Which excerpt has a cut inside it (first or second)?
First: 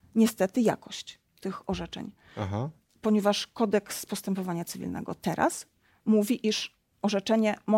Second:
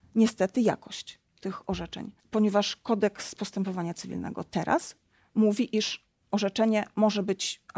second